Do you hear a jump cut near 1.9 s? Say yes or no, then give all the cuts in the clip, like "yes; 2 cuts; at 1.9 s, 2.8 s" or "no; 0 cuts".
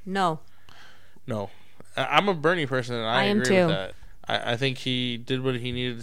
no; 0 cuts